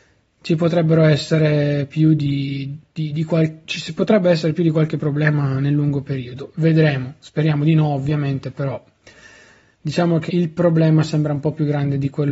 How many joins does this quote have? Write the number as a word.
one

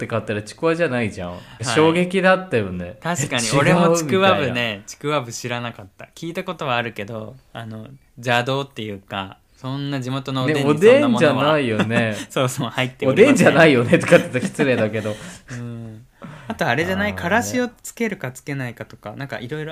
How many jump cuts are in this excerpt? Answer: two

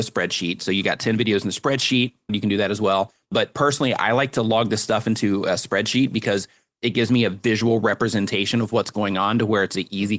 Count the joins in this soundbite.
one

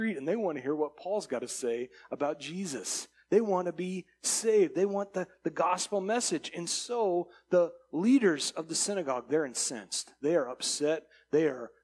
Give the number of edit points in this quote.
zero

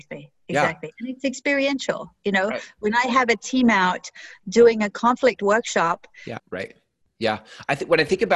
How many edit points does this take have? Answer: one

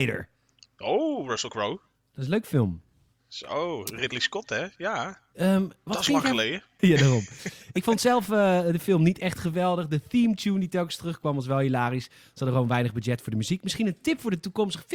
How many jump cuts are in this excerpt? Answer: one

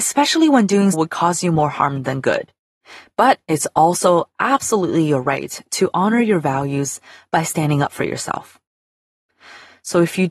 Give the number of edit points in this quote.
one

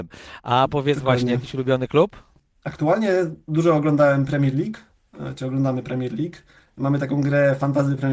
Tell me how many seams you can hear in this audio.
zero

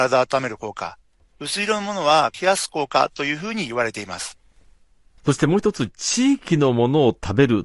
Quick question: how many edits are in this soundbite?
one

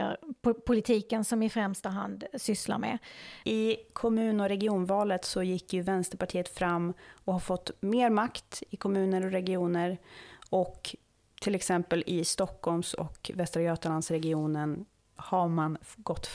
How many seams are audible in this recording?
two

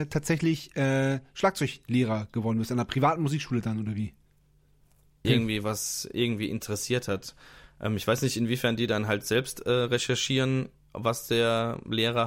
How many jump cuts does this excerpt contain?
one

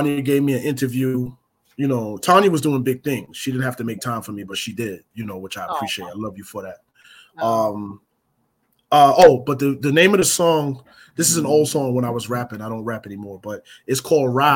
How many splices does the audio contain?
zero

